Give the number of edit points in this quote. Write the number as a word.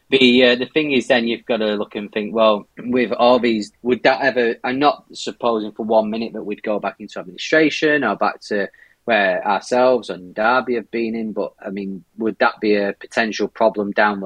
two